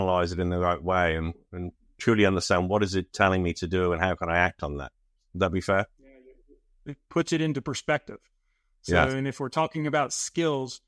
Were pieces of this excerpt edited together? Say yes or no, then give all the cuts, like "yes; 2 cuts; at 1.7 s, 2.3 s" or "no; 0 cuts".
no; 0 cuts